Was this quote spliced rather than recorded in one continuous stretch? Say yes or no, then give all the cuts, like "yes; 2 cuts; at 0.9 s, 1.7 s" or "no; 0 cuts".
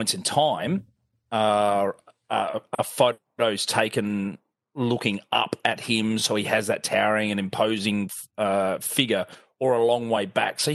no; 0 cuts